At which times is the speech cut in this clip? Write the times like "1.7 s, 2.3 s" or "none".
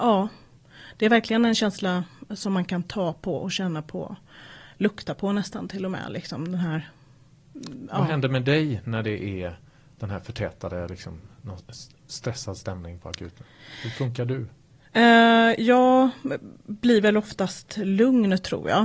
none